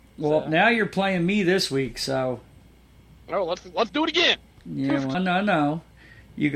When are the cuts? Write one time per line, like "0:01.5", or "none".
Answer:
0:05.1